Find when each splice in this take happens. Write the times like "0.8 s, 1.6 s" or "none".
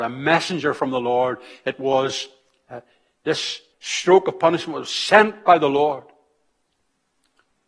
3.7 s